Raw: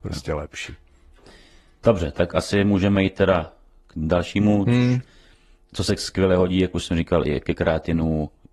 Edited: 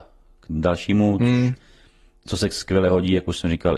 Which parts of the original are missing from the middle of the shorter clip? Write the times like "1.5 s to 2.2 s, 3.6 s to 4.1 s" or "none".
none